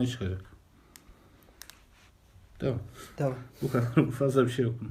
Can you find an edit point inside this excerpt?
no; 0 cuts

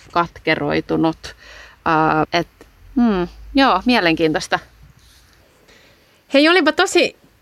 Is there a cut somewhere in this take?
yes; 1 cut; at 2.2 s

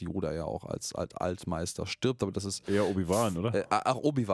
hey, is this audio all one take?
yes; 0 cuts

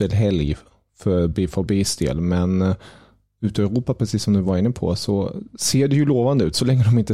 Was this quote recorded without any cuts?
yes; 0 cuts

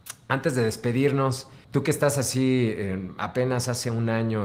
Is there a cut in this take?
yes; 2 cuts; at 1.6 s, 3.2 s

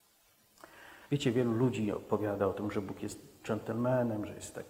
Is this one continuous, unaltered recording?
no; 1 cut; at 1.1 s

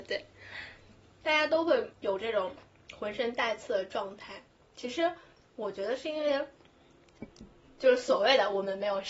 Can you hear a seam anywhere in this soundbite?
yes; 1 cut; at 1.0 s

